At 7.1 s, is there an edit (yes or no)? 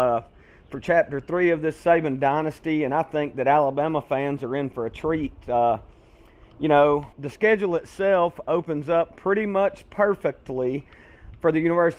yes